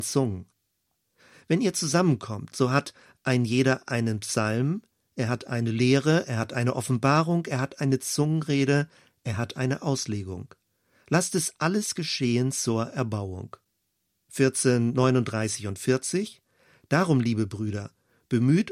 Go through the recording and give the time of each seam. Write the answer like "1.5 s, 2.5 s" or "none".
1.3 s

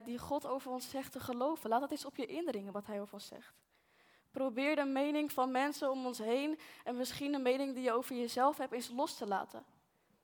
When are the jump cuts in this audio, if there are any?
none

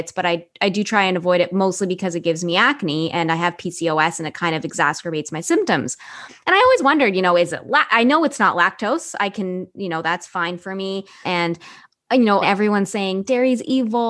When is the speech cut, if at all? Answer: 11.2 s, 12.4 s

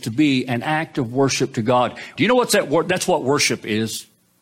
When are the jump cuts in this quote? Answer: 2.2 s

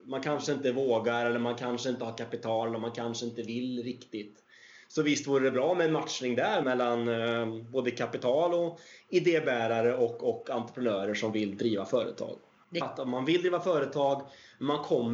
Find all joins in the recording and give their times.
6.6 s, 12.8 s

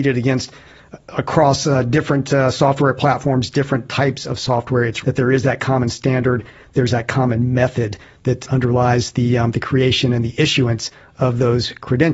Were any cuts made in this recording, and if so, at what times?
5.0 s

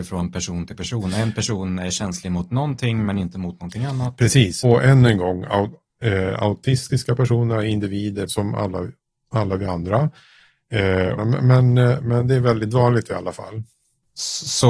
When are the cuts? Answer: 4.6 s, 8.3 s, 11.2 s

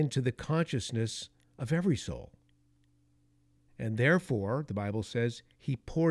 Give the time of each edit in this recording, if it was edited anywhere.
3.7 s

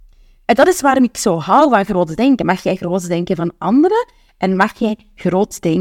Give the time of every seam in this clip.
2.4 s

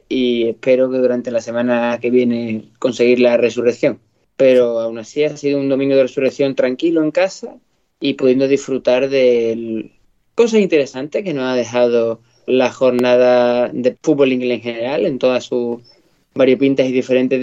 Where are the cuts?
12.5 s, 14.0 s

